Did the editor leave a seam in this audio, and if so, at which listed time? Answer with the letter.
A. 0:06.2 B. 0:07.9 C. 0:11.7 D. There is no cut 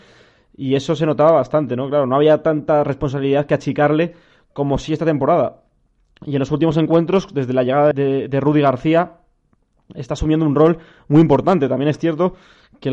B